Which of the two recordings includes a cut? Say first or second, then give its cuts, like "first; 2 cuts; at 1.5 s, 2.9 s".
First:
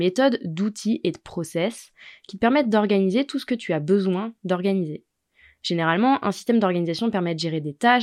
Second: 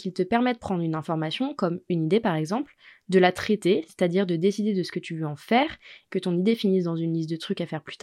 second; 1 cut; at 6.1 s